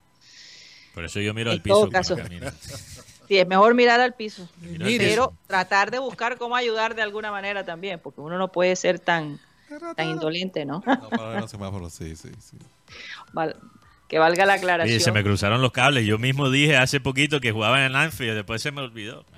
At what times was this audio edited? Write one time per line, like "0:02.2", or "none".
0:10.8
0:13.2